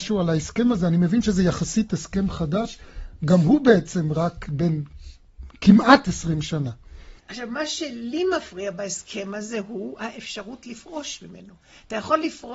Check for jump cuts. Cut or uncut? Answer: cut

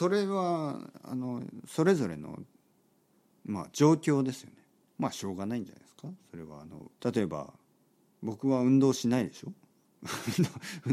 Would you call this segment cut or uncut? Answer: cut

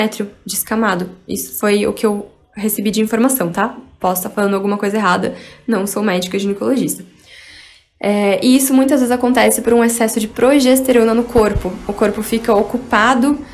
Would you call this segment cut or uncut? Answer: cut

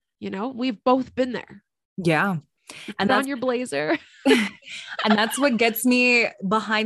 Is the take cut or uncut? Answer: uncut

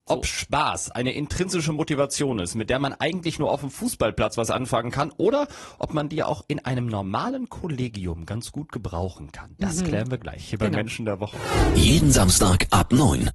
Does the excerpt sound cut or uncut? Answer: uncut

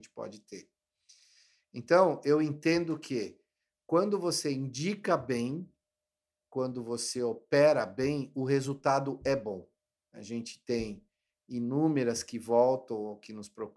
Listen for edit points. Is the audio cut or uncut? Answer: cut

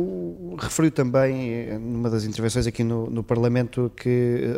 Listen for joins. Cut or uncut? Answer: uncut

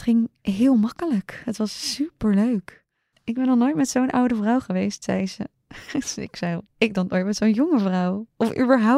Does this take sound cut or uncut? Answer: cut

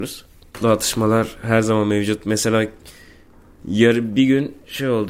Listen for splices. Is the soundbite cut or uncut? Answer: uncut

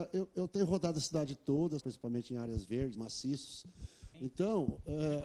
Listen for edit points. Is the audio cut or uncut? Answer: cut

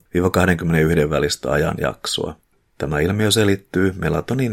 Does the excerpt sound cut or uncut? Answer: cut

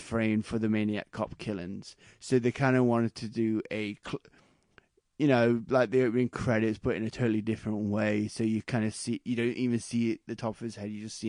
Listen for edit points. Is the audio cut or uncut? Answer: uncut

